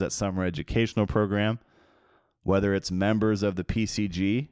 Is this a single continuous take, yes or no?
yes